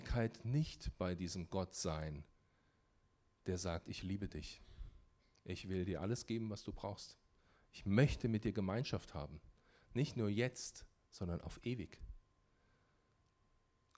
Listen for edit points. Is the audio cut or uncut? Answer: uncut